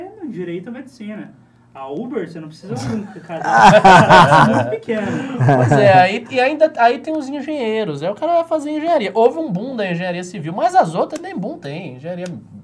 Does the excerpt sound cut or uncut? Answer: uncut